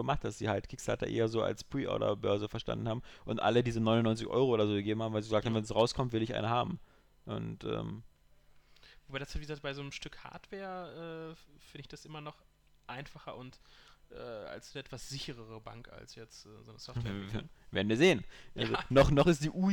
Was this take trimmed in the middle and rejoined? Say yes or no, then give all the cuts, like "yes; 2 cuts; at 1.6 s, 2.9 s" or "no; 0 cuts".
no; 0 cuts